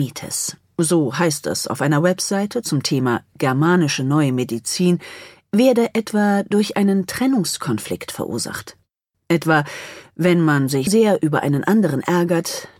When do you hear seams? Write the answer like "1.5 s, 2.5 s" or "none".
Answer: 9.1 s, 10.9 s